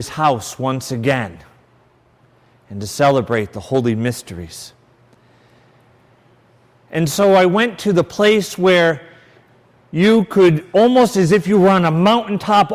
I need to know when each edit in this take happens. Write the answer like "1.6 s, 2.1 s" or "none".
none